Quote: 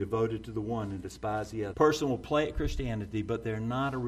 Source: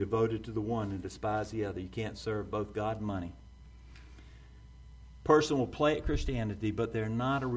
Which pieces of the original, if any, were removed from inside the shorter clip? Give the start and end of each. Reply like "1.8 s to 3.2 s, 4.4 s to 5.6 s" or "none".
1.7 s to 5.2 s